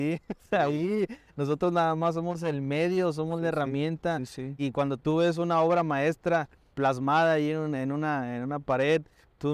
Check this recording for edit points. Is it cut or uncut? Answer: cut